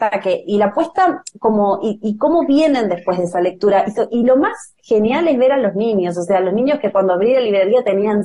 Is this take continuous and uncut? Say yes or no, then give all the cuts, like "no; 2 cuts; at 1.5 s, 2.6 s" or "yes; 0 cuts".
yes; 0 cuts